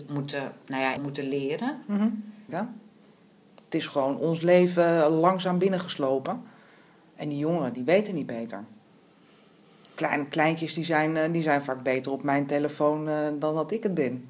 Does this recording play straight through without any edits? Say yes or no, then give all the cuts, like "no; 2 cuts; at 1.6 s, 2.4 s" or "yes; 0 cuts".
no; 2 cuts; at 1.0 s, 2.5 s